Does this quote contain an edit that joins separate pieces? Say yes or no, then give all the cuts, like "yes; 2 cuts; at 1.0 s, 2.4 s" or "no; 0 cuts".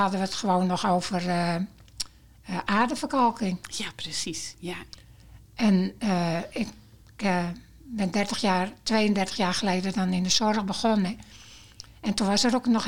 no; 0 cuts